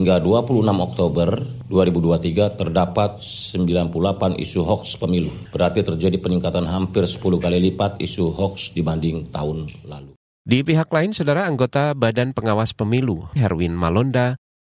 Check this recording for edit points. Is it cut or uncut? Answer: cut